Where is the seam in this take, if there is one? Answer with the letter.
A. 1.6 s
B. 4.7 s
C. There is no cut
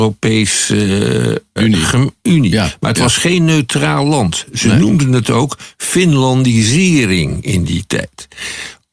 A